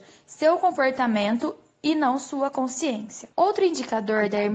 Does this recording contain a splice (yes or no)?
yes